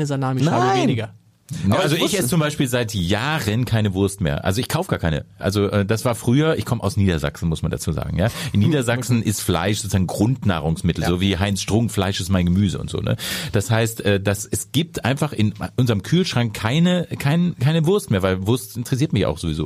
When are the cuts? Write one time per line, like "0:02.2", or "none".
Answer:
none